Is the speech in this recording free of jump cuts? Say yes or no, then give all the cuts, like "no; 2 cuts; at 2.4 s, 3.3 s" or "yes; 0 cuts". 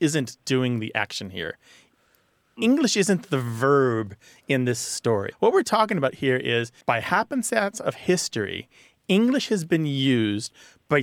no; 2 cuts; at 5.3 s, 6.8 s